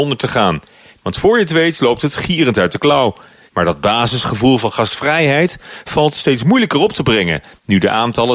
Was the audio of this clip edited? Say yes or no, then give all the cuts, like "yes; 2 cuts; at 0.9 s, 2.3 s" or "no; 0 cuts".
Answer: yes; 2 cuts; at 1.0 s, 3.5 s